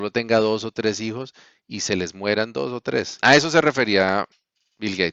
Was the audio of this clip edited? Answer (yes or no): yes